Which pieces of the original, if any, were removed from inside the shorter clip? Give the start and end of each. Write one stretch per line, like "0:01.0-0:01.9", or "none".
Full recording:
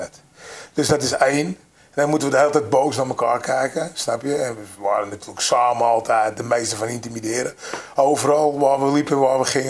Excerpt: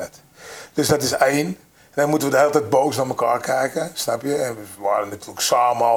none